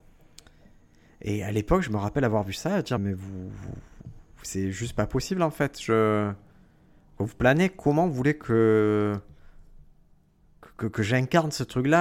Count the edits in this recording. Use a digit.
1